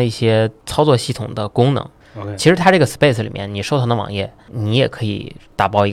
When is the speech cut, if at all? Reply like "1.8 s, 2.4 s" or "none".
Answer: 2.0 s